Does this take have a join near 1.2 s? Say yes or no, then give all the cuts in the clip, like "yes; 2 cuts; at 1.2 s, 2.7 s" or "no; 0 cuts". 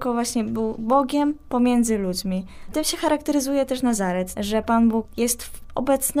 no; 2 cuts; at 2.7 s, 4.3 s